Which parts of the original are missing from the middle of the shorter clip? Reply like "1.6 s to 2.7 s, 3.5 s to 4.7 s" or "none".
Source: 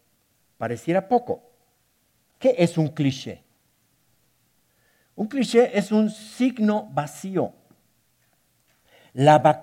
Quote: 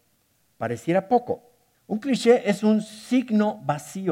1.7 s to 5.0 s